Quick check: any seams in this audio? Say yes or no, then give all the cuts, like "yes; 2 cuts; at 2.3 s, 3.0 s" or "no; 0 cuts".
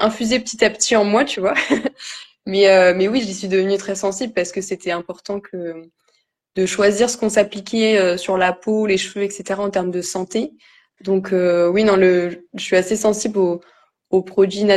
yes; 1 cut; at 11.0 s